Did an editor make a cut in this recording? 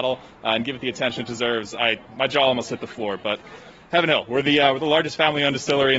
yes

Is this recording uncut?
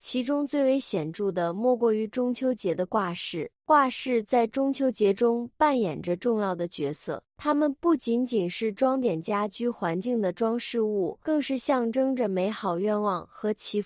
no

